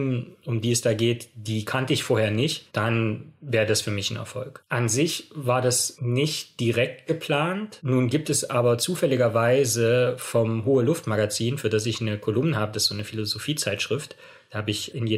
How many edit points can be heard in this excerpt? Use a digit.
1